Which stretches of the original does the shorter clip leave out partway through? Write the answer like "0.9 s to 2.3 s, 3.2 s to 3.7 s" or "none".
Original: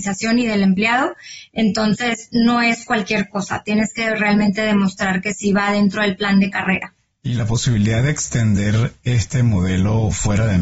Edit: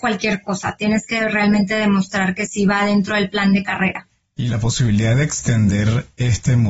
none